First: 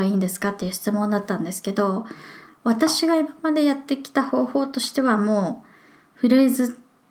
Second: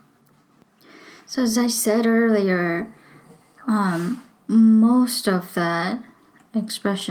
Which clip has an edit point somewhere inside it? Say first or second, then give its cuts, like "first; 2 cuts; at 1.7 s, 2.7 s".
first; 1 cut; at 2.5 s